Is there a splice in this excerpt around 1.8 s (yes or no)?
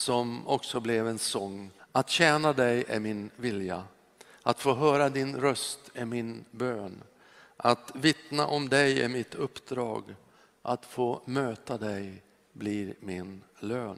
yes